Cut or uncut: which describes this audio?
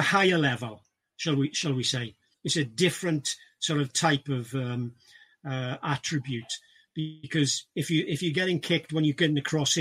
cut